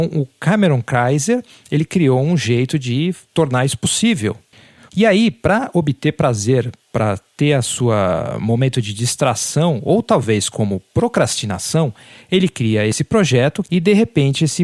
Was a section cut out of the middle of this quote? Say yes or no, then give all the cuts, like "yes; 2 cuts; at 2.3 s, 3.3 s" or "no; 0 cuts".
yes; 2 cuts; at 4.9 s, 13.6 s